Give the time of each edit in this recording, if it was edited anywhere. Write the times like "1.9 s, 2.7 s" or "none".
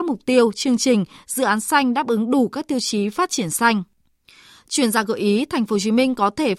none